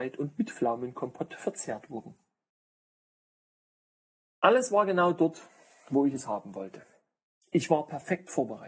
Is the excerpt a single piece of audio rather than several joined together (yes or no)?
yes